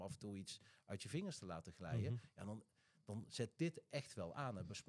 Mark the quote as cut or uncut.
uncut